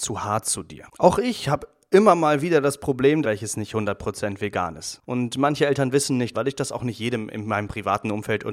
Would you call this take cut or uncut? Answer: cut